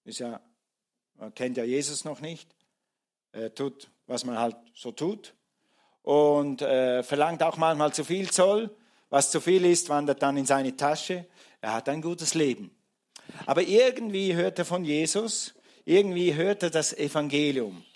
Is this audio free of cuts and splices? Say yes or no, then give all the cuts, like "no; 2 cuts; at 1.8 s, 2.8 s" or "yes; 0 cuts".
yes; 0 cuts